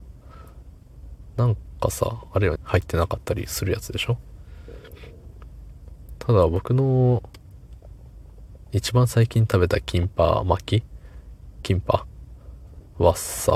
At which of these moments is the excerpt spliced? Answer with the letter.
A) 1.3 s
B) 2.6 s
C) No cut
B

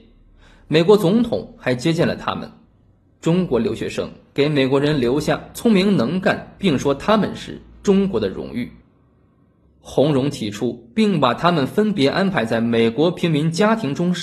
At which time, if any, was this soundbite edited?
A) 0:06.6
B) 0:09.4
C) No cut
A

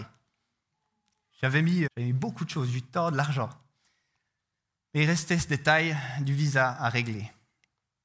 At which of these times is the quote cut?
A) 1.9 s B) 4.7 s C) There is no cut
A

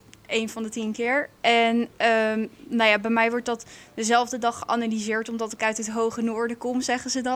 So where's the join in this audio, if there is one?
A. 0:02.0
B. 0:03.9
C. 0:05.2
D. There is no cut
D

